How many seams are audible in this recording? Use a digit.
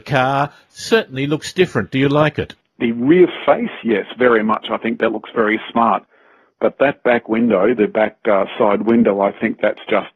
0